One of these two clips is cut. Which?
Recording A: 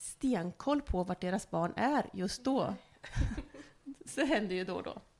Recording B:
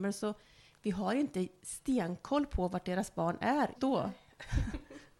B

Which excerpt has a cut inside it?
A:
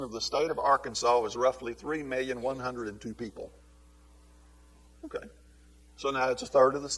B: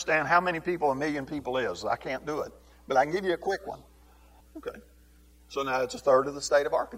B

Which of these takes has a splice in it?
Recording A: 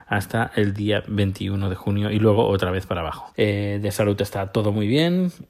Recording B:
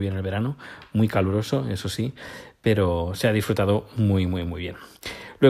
A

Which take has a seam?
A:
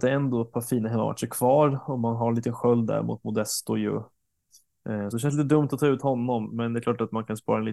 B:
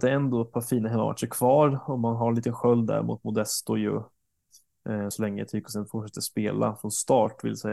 A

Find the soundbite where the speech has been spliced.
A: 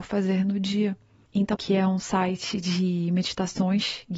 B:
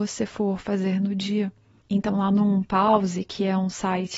A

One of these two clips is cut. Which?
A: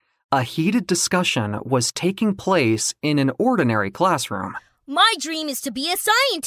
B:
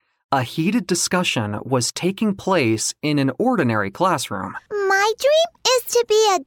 B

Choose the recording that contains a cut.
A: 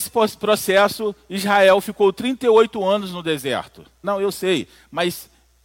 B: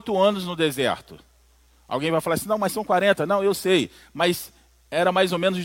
A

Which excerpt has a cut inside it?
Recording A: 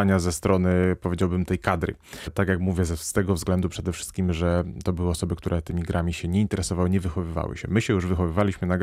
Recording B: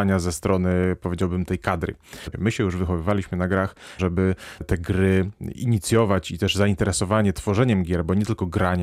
B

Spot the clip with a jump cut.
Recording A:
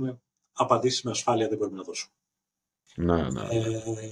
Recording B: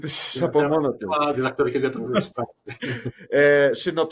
A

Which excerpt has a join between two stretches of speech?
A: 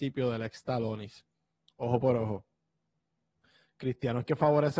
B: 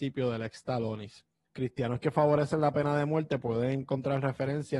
B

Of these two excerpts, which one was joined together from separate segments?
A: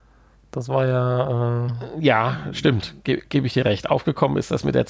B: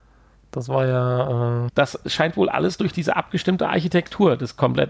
B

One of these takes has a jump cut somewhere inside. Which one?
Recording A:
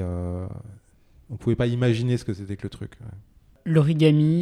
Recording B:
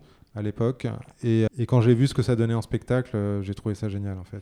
B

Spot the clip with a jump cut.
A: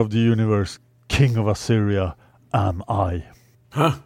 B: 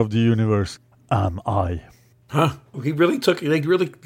B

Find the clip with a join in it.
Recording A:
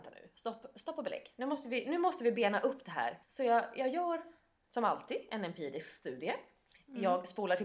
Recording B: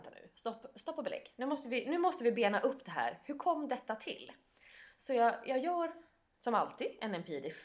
A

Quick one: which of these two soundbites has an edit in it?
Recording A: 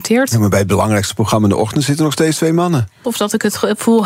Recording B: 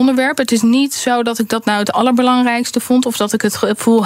A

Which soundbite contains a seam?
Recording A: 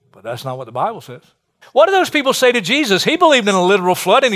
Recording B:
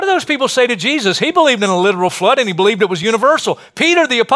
A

